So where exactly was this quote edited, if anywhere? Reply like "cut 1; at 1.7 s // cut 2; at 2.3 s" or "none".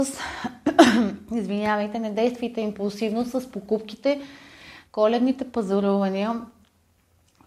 cut 1; at 4.8 s